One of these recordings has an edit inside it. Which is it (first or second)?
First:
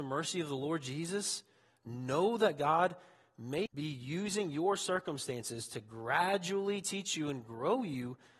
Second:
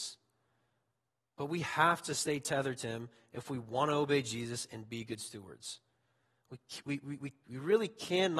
first